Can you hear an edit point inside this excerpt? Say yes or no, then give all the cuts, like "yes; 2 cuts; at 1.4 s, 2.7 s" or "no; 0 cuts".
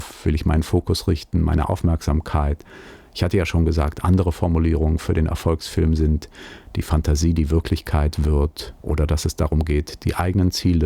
no; 0 cuts